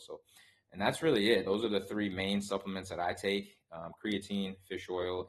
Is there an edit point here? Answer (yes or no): no